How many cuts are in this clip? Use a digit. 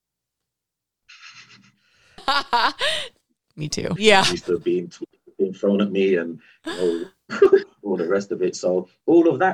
2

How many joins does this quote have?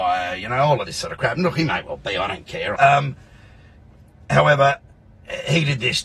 1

